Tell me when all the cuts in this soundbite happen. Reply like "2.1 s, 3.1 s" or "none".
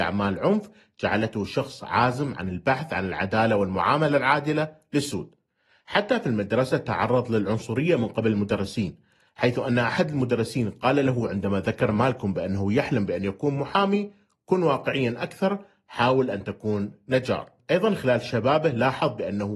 none